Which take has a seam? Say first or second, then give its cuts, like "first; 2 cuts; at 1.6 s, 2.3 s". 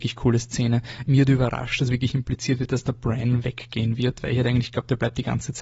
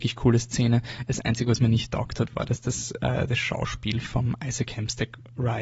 first; 1 cut; at 1.1 s